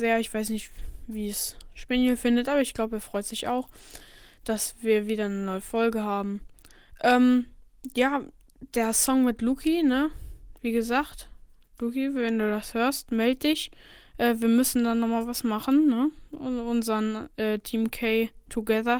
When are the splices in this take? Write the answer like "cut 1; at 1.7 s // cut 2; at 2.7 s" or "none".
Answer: none

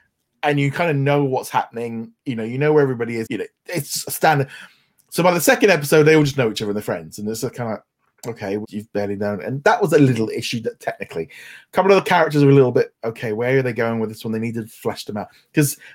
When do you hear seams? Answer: cut 1; at 3.3 s // cut 2; at 8.6 s // cut 3; at 12.9 s

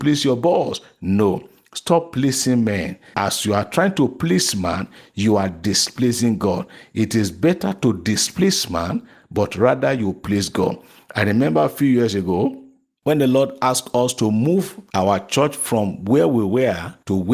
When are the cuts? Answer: none

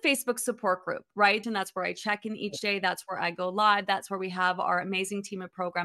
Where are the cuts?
cut 1; at 1.4 s

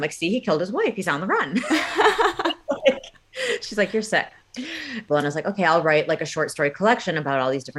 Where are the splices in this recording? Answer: cut 1; at 5.1 s

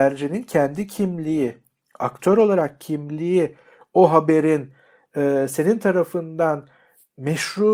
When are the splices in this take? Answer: none

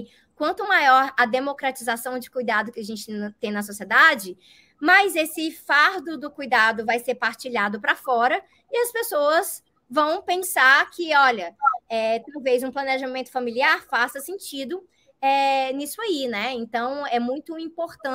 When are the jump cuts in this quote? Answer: cut 1; at 17.1 s

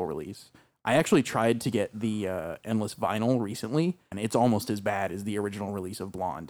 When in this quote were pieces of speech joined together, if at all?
cut 1; at 4.1 s

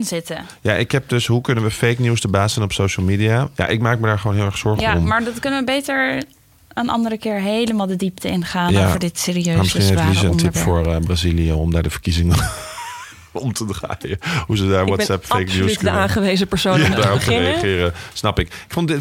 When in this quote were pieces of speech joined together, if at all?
cut 1; at 16.9 s

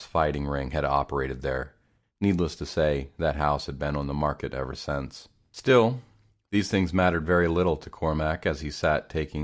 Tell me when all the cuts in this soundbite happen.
cut 1; at 2.0 s

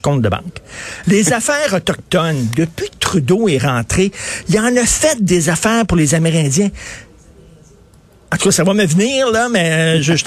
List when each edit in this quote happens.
cut 1; at 1.0 s

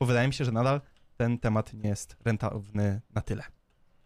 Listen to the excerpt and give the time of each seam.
none

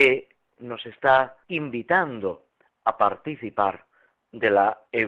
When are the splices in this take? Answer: cut 1; at 1.4 s

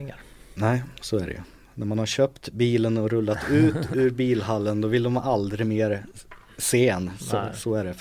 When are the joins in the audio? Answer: none

